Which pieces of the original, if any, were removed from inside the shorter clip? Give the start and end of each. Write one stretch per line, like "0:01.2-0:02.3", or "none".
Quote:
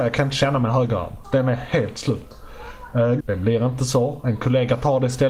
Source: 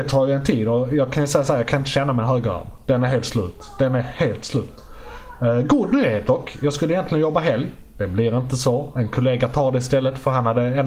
0:02.8-0:03.7
0:05.7-0:07.9